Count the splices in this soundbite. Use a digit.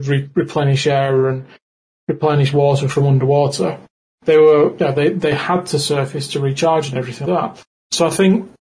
1